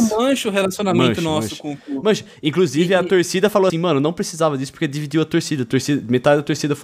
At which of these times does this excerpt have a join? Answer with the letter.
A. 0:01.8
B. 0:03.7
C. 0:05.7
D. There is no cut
B